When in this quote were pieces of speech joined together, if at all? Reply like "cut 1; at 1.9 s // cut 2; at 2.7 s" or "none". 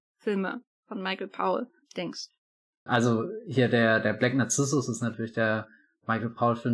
cut 1; at 2.9 s